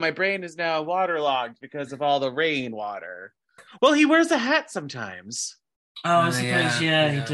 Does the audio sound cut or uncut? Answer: cut